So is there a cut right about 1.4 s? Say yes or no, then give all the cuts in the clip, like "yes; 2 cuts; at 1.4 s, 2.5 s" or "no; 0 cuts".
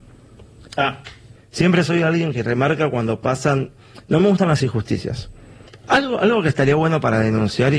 yes; 2 cuts; at 1.4 s, 5.7 s